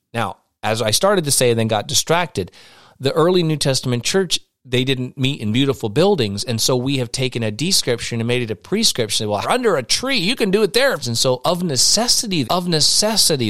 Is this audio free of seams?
no; 3 cuts; at 9.4 s, 11.0 s, 12.4 s

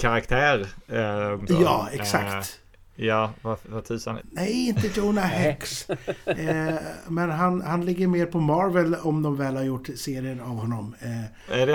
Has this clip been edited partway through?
yes; 2 cuts; at 1.5 s, 4.2 s

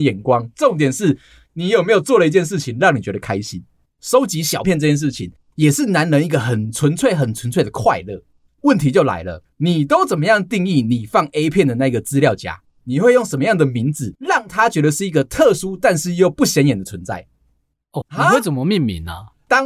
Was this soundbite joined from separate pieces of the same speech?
yes; 2 cuts; at 4.6 s, 18.0 s

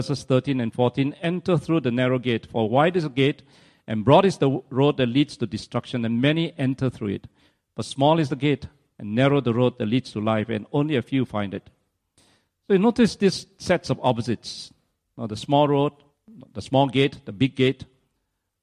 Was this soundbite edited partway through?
no; 0 cuts

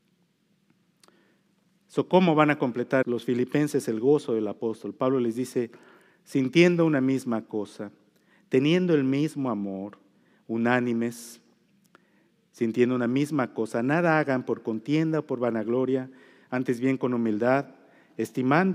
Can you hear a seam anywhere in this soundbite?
yes; 1 cut; at 3.0 s

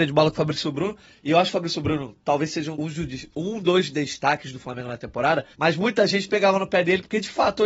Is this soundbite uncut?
no; 2 cuts; at 2.7 s, 5.5 s

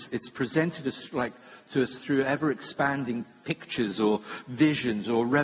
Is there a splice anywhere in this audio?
no; 0 cuts

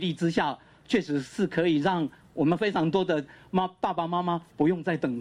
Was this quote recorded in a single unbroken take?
yes; 0 cuts

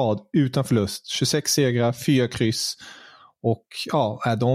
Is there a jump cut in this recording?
no; 0 cuts

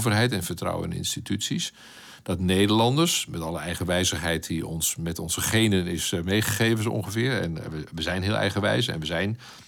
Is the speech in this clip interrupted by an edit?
no; 0 cuts

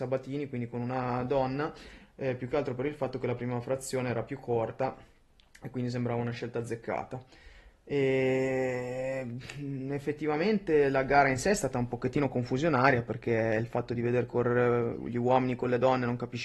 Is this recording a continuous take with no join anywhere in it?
yes; 0 cuts

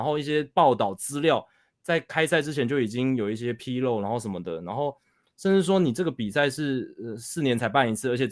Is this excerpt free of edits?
yes; 0 cuts

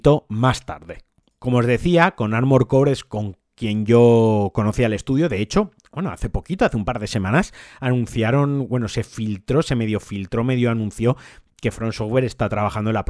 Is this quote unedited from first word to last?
yes; 0 cuts

